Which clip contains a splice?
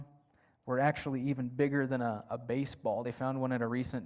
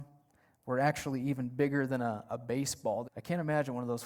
second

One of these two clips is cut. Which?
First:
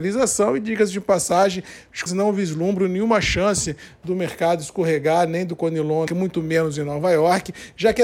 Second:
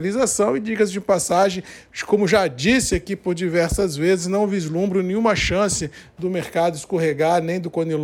first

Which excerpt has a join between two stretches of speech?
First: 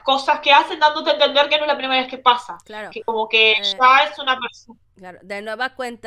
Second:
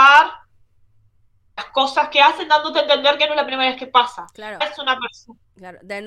second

